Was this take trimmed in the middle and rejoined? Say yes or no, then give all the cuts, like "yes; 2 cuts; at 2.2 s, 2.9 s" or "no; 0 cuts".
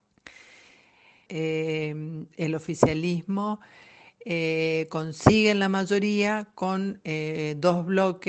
yes; 1 cut; at 1.3 s